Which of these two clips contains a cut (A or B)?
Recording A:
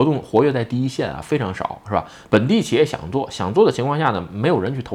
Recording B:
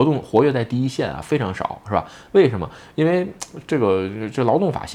A